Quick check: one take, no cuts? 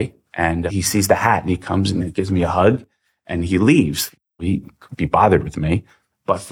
yes; 0 cuts

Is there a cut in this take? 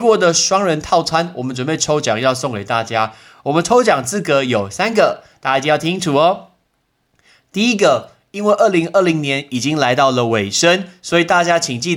no; 0 cuts

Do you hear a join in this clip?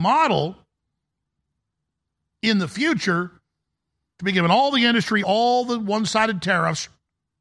yes; 1 cut; at 5.2 s

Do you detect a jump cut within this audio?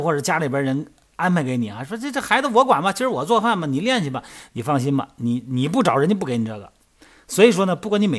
no; 0 cuts

